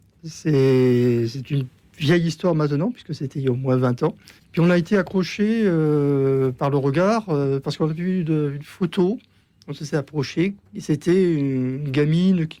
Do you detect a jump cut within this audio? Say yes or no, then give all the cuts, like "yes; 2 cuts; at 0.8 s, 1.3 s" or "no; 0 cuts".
yes; 1 cut; at 4.4 s